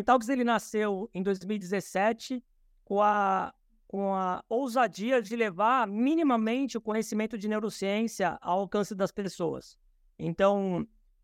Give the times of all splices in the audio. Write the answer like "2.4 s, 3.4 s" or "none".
none

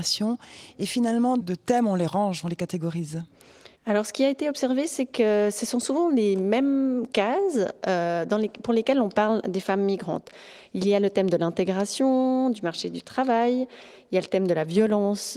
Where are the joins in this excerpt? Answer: 1.4 s, 3.7 s

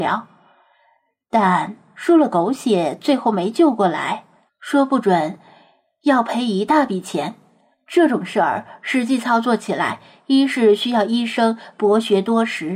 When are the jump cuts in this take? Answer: 4.5 s

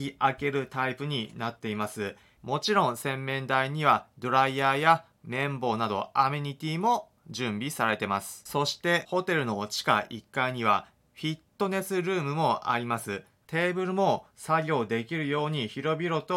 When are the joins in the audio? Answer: 2.4 s, 13.4 s

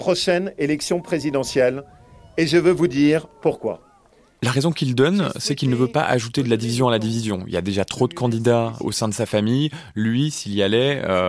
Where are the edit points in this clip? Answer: none

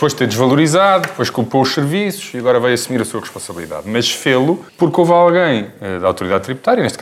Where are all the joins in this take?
4.7 s

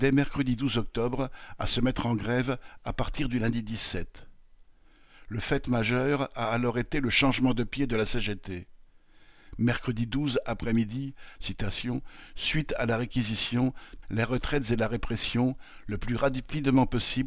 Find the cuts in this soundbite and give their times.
11.3 s, 14.0 s

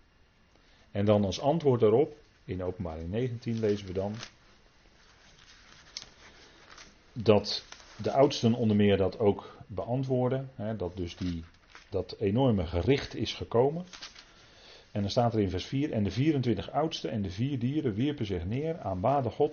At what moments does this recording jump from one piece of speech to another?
11.9 s

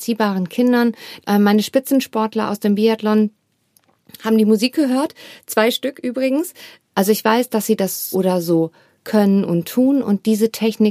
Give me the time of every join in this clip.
1.2 s, 6.9 s, 8.1 s

